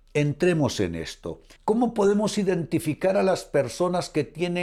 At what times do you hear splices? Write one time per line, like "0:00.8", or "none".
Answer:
0:01.6